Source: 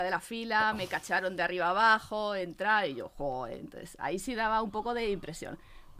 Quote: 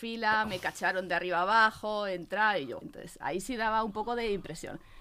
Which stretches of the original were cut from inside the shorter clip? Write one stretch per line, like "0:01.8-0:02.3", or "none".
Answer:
0:03.1-0:03.6